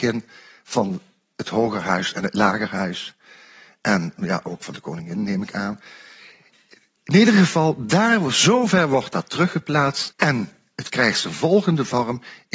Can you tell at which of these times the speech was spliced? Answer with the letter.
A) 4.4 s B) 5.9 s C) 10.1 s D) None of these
C